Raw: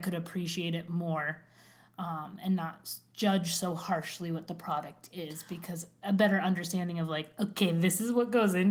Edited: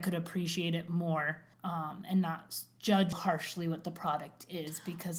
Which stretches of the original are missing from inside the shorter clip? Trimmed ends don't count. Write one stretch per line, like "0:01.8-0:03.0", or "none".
0:01.5-0:01.9
0:03.5-0:03.8

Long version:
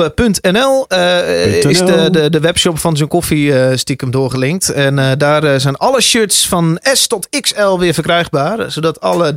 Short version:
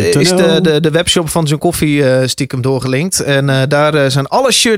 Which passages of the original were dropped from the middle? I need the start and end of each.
none

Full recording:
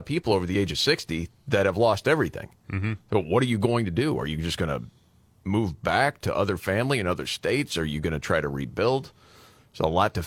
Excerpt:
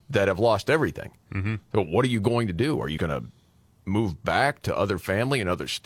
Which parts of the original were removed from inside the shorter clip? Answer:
0:04.3-0:04.6

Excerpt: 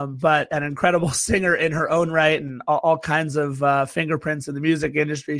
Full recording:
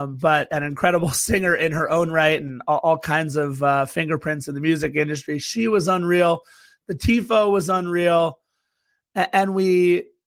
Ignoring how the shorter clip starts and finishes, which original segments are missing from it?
none

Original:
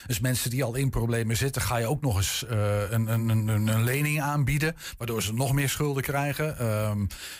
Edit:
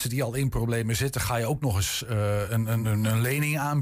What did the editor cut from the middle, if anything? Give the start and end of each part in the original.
0:03.2-0:03.4

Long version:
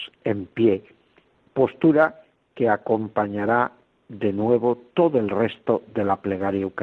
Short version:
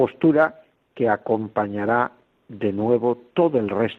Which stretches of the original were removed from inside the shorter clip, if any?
none

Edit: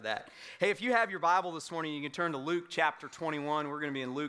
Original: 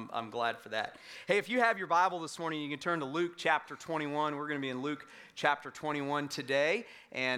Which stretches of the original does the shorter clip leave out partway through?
none

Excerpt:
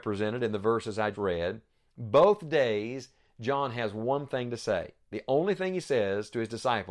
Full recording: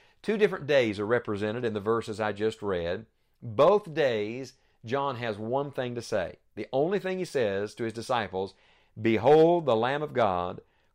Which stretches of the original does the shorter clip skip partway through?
0:02.3-0:02.6

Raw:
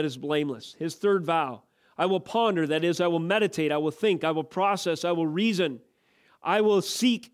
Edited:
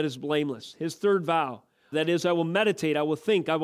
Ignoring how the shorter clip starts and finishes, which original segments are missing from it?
0:01.9-0:02.7

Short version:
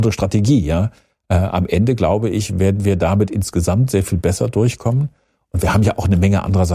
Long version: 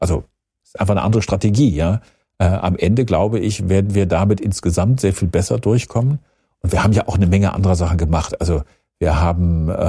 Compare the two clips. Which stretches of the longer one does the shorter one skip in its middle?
none

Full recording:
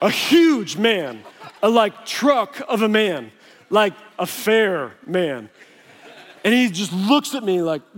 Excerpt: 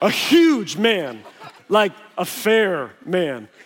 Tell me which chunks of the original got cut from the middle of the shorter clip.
0:01.6-0:03.6

